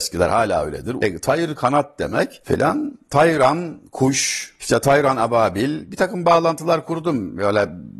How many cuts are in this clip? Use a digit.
1